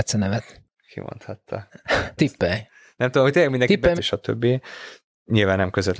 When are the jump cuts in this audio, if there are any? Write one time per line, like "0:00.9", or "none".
0:02.2
0:04.0